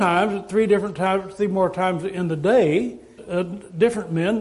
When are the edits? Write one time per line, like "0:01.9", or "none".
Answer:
0:03.2